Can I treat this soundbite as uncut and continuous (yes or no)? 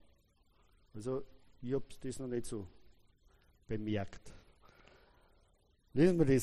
yes